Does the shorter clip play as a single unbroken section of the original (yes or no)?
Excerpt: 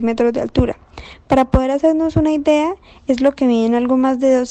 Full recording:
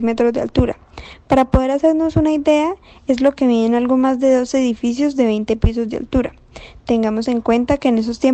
yes